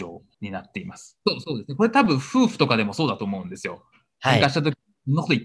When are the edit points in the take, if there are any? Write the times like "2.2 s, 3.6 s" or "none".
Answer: 1.2 s